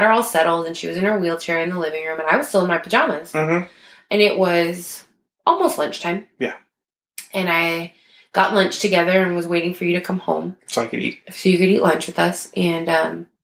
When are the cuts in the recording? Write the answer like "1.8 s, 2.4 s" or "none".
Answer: none